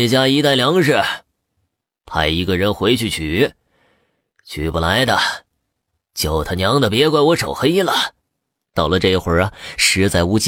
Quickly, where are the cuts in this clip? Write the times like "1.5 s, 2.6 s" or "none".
8.6 s